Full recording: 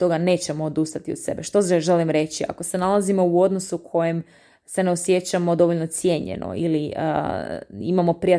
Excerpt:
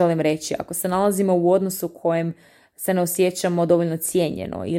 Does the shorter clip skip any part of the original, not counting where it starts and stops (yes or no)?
no